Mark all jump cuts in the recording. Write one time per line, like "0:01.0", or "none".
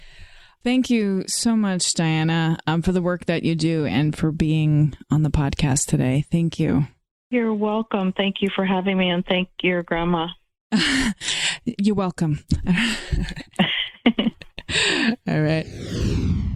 none